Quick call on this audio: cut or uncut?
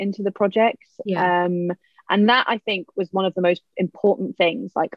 uncut